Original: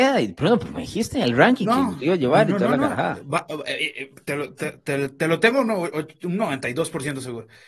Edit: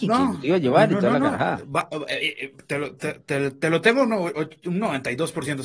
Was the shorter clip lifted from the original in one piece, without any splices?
yes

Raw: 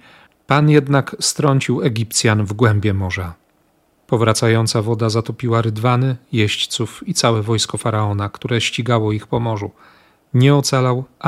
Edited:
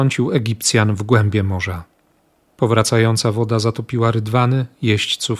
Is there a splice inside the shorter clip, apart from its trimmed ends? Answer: no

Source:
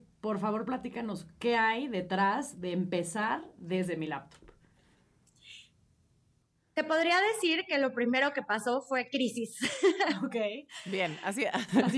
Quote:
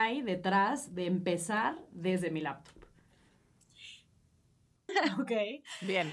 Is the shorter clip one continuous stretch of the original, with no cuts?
no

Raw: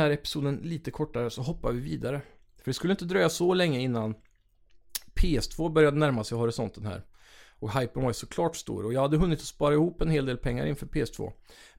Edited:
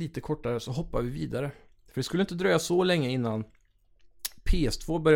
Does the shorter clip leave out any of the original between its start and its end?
no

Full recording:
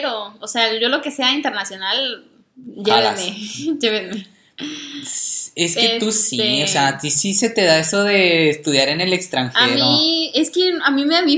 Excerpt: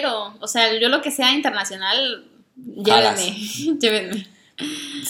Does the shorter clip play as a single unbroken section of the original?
yes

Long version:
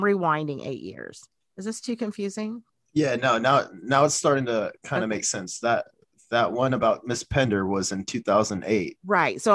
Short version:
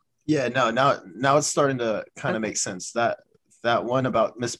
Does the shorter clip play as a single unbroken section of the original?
yes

